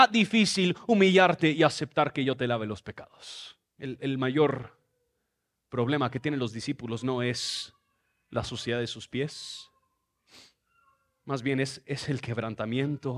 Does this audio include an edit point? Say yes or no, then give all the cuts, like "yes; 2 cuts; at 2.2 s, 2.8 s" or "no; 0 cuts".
yes; 1 cut; at 3.6 s